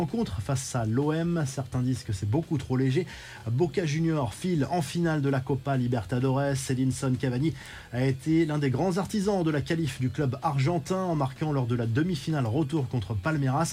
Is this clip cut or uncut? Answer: uncut